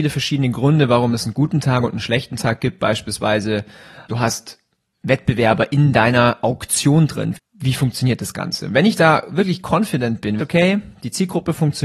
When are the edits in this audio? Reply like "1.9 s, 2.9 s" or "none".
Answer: 4.1 s, 7.3 s, 10.4 s